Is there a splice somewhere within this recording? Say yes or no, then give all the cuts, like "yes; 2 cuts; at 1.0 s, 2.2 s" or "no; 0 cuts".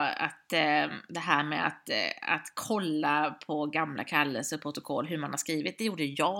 no; 0 cuts